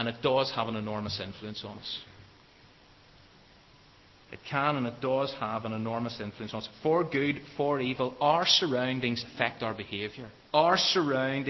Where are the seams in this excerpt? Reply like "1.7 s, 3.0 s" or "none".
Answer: 10.5 s